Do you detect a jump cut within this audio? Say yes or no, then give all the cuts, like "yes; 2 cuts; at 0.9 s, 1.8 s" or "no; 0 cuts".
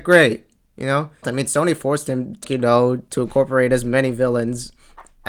yes; 2 cuts; at 1.2 s, 2.4 s